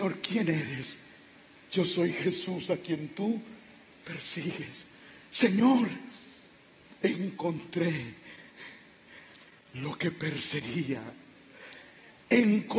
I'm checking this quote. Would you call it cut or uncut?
uncut